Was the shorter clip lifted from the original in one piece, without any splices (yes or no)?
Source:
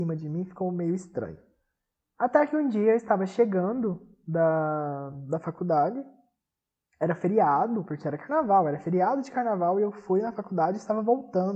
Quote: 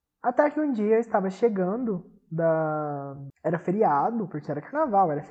no